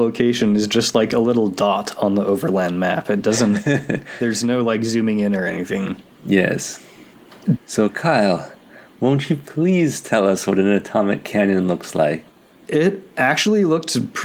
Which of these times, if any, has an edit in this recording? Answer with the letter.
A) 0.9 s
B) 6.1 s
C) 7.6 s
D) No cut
C